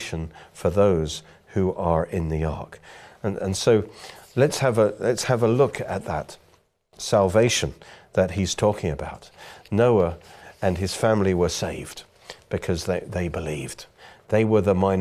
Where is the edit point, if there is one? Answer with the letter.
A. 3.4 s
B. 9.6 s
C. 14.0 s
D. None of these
D